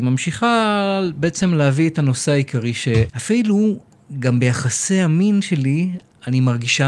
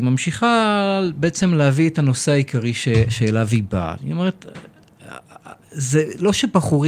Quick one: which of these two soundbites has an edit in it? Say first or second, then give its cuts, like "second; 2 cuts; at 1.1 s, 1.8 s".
first; 1 cut; at 3.1 s